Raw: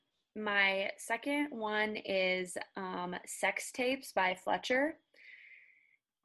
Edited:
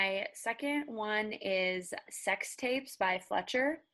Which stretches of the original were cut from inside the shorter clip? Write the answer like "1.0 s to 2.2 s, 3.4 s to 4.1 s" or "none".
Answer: 2.7 s to 3.2 s